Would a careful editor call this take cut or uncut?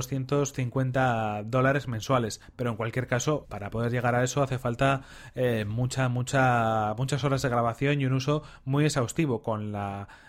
cut